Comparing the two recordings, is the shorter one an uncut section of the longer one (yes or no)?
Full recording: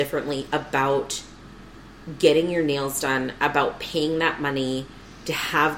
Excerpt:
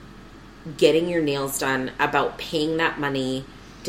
yes